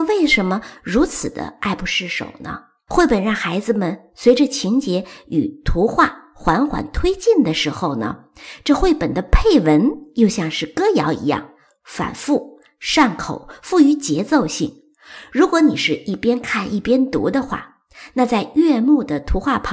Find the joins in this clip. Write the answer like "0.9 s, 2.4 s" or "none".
2.9 s